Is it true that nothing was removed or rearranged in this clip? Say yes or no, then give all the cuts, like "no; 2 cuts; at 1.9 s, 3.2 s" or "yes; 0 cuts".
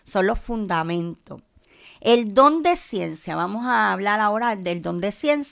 yes; 0 cuts